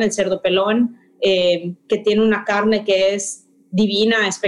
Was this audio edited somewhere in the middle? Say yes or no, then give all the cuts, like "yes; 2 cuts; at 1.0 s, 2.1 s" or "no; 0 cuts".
no; 0 cuts